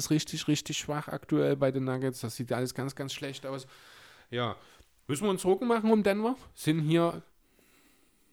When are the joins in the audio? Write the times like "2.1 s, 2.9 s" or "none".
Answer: none